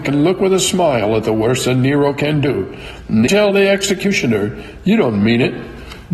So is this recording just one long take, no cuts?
no; 1 cut; at 3.3 s

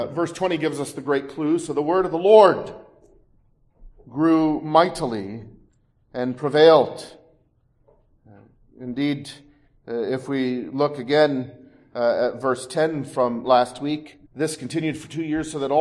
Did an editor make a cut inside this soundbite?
yes; 1 cut; at 14.3 s

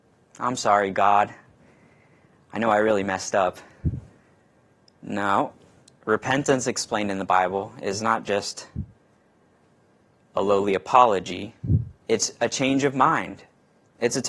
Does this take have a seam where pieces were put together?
no; 0 cuts

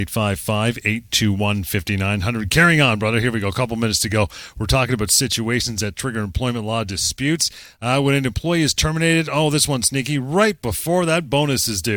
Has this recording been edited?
no; 0 cuts

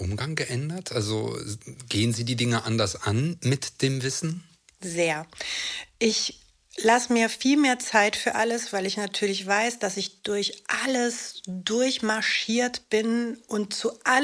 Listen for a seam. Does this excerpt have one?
no; 0 cuts

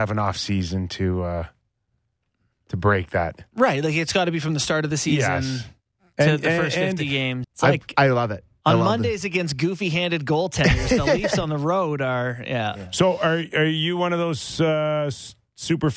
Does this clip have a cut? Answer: yes; 1 cut; at 7.4 s

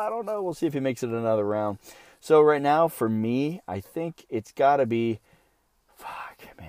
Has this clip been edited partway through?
no; 0 cuts

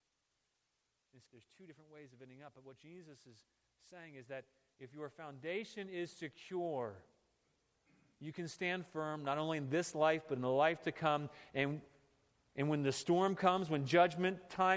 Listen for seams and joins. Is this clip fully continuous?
no; 1 cut; at 1.3 s

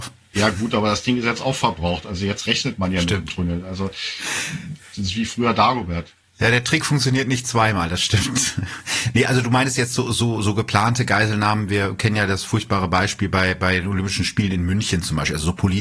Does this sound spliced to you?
no; 0 cuts

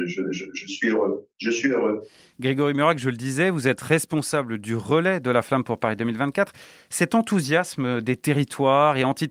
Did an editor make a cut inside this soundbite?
no; 0 cuts

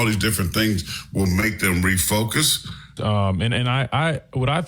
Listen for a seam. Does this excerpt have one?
yes; 1 cut; at 3.0 s

